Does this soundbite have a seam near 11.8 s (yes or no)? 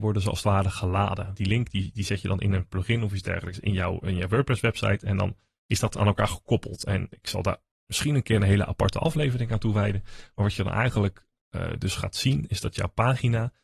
no